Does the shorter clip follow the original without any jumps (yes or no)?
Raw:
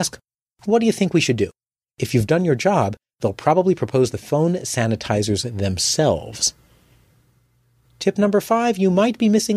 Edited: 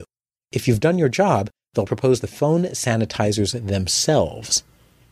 no